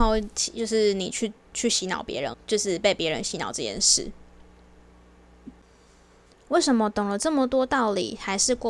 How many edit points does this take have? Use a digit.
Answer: 2